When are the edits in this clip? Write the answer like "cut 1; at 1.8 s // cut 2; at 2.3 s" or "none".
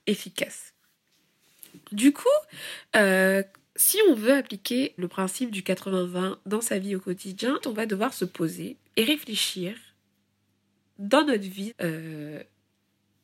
cut 1; at 5.0 s // cut 2; at 7.6 s // cut 3; at 11.7 s